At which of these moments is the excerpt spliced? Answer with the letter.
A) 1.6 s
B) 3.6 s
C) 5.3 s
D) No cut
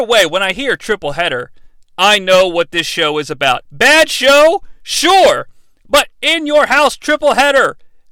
B